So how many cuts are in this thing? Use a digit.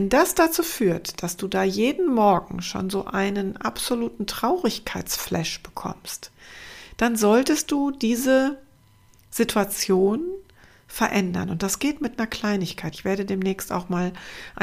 1